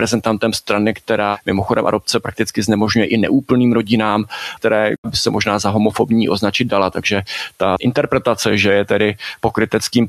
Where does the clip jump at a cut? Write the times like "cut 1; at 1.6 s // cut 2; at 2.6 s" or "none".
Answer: cut 1; at 4.6 s